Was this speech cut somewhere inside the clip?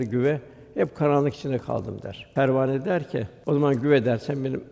no; 0 cuts

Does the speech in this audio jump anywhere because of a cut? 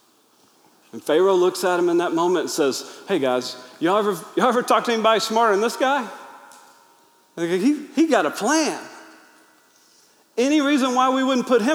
no; 0 cuts

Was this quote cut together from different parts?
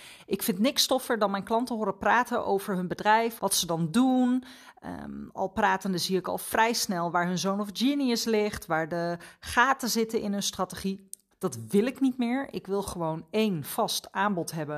yes; 2 cuts; at 3.4 s, 11.3 s

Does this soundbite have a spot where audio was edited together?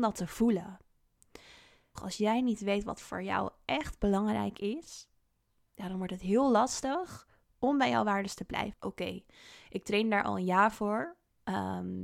yes; 2 cuts; at 2.0 s, 8.7 s

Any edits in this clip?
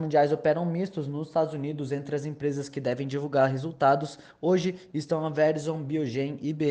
no; 0 cuts

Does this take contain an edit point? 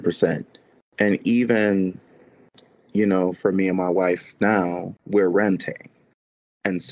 yes; 1 cut; at 5.0 s

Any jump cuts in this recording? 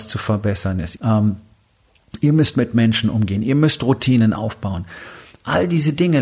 yes; 1 cut; at 1.0 s

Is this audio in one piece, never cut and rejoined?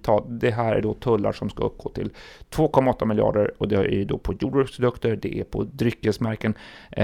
yes; 0 cuts

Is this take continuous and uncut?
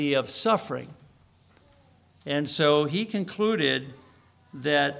yes; 0 cuts

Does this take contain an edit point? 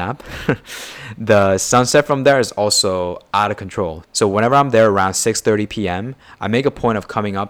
no; 0 cuts

